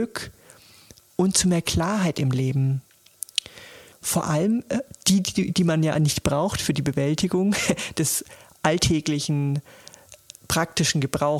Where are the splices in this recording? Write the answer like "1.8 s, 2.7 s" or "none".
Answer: 3.9 s